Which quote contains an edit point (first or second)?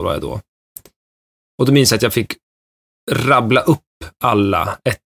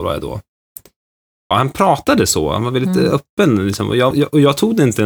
second